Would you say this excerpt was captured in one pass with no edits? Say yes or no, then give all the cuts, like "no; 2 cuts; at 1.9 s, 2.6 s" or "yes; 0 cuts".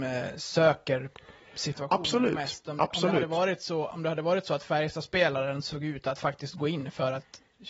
yes; 0 cuts